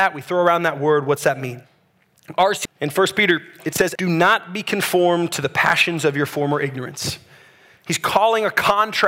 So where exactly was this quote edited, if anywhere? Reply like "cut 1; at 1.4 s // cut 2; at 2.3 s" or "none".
cut 1; at 2.7 s // cut 2; at 4.0 s